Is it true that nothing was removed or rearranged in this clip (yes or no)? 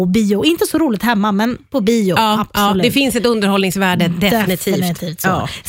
yes